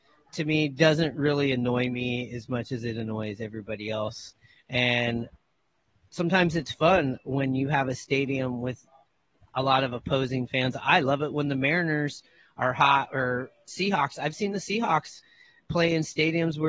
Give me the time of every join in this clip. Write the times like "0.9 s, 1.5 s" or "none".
none